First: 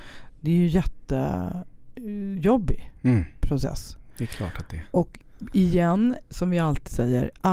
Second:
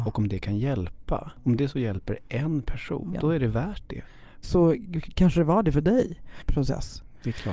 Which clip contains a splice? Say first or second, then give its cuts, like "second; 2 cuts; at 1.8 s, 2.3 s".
second; 3 cuts; at 3.1 s, 4.4 s, 6.4 s